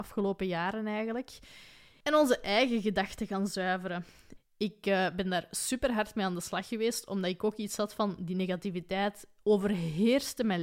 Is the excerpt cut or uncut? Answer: cut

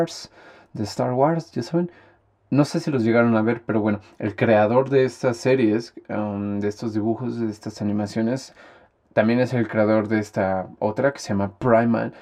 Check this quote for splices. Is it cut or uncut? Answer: uncut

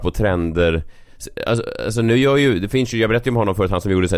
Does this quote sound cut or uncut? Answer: uncut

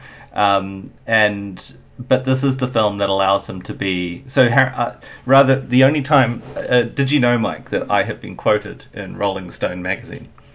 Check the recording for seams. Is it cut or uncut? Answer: uncut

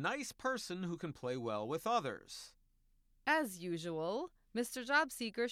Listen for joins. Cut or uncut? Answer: uncut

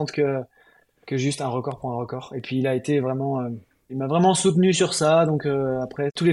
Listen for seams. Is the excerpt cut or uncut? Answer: uncut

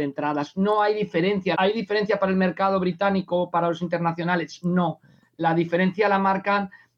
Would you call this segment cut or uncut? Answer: cut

